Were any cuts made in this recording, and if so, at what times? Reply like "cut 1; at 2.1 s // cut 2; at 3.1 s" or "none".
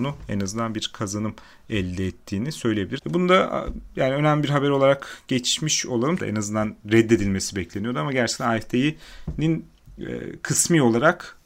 cut 1; at 3.0 s // cut 2; at 6.2 s